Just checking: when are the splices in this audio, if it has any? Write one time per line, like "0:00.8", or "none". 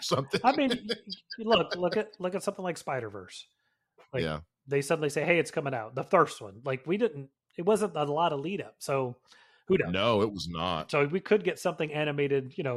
none

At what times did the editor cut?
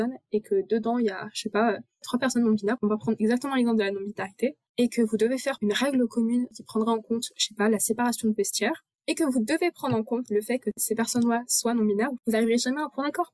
0:08.9

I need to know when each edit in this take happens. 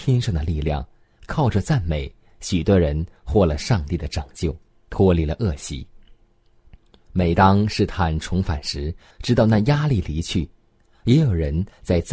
0:09.1

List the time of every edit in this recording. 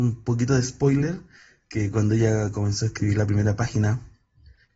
none

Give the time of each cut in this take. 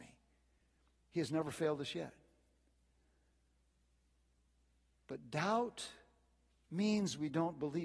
0:01.0

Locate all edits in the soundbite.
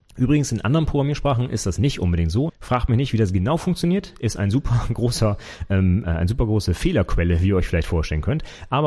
0:02.5

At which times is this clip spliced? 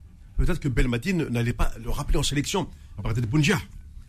0:03.0

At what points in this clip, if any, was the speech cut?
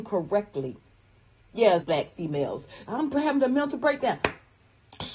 0:01.8
0:02.8

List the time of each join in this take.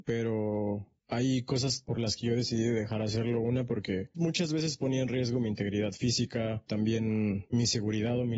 0:04.1
0:06.7

